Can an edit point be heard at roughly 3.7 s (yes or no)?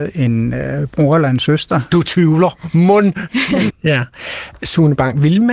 yes